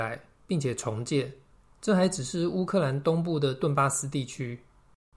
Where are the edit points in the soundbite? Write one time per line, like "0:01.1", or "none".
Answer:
0:01.7